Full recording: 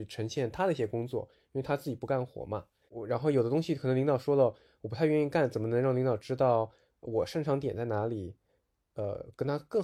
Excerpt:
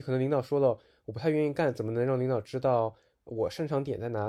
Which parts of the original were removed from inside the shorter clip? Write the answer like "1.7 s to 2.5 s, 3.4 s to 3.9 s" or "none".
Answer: none